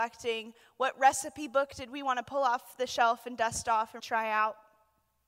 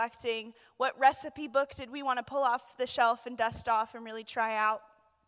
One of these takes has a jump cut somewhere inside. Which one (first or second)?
first